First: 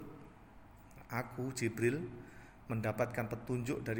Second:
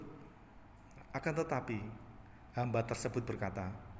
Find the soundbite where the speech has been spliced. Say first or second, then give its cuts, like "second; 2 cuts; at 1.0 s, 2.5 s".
second; 1 cut; at 1.1 s